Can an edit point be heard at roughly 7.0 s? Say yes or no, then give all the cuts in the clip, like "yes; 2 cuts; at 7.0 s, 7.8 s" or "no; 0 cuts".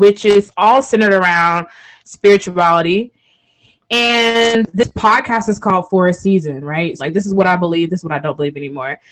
yes; 1 cut; at 7.0 s